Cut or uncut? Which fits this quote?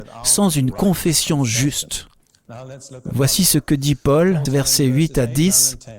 cut